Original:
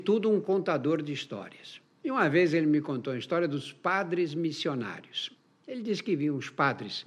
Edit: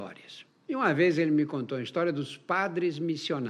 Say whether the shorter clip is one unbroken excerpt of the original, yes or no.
yes